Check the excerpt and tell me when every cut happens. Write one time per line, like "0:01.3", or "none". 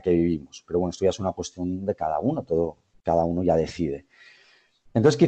none